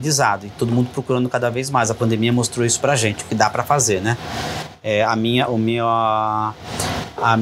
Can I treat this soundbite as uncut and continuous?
yes; 0 cuts

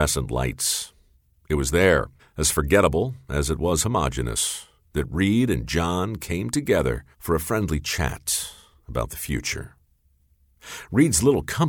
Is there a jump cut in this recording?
yes; 2 cuts; at 2.2 s, 7.1 s

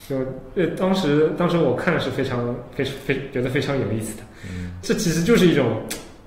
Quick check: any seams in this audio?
yes; 1 cut; at 4.8 s

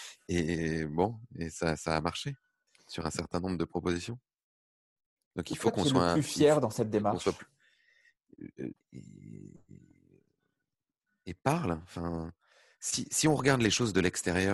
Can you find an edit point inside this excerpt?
yes; 1 cut; at 8.7 s

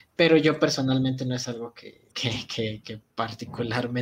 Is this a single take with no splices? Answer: no; 1 cut; at 2.1 s

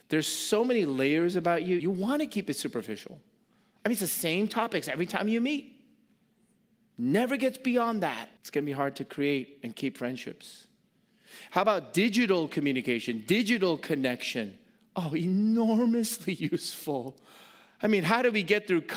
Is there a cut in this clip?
yes; 2 cuts; at 1.8 s, 8.4 s

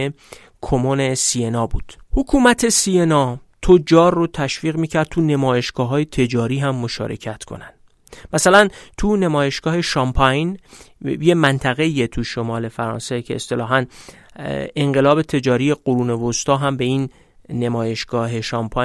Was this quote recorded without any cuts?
no; 1 cut; at 2.0 s

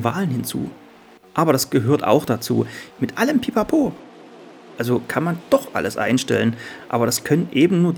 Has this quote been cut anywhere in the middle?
yes; 1 cut; at 2.9 s

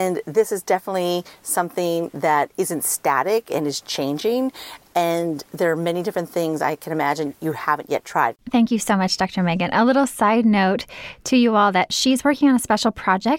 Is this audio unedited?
no; 1 cut; at 8.3 s

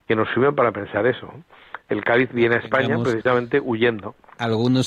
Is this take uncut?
no; 1 cut; at 1.8 s

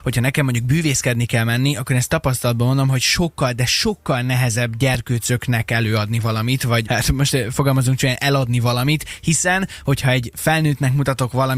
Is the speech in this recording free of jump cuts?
no; 1 cut; at 6.8 s

